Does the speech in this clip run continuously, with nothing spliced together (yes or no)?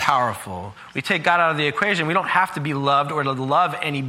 yes